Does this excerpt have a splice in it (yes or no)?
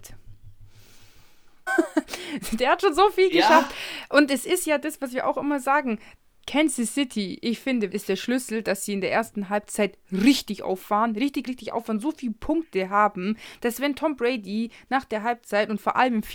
yes